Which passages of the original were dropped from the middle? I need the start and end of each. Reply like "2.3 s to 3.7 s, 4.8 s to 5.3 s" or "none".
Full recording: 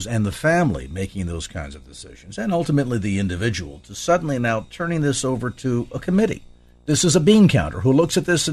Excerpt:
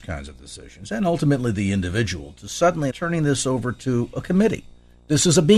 4.4 s to 4.7 s